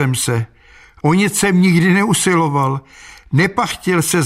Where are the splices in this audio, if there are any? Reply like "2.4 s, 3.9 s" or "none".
1.0 s